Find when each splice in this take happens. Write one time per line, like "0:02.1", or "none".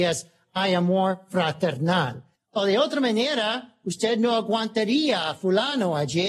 0:02.4

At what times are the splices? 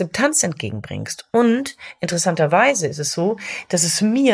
none

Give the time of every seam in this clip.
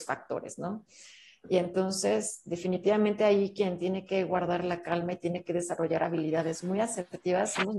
none

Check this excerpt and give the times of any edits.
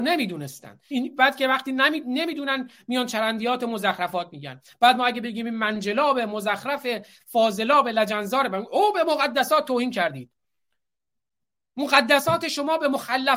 0:00.9

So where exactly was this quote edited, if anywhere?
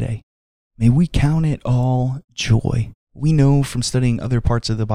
0:03.0

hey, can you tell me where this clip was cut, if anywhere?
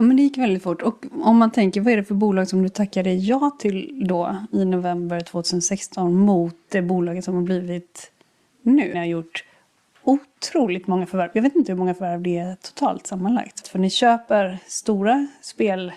0:08.9
0:13.6

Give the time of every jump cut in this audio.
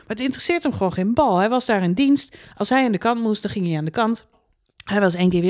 none

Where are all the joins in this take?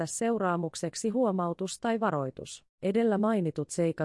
0:02.7

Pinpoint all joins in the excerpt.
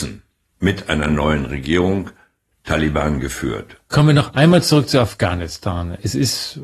0:03.9

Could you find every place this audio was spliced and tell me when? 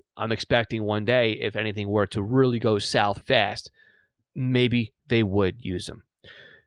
0:03.2

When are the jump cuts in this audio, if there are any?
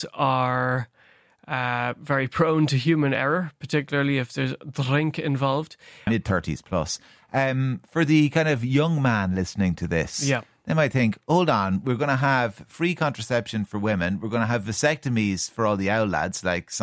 0:06.1

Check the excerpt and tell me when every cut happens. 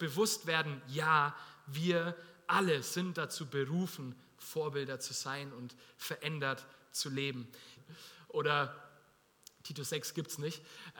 0:07.8

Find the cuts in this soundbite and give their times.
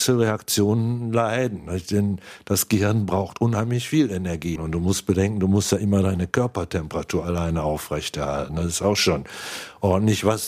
0:04.6

